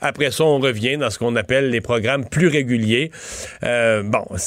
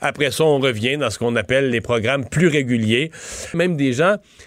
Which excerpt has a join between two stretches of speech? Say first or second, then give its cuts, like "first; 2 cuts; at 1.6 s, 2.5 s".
second; 1 cut; at 3.5 s